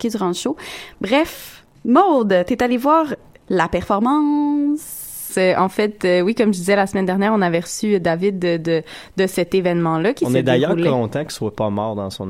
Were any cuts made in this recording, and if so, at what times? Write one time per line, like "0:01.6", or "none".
0:05.3
0:09.1